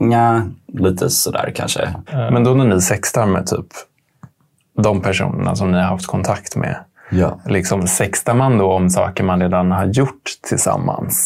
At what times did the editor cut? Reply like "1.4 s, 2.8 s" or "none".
2.1 s